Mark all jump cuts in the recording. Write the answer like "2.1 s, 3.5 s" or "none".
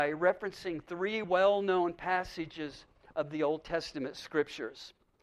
none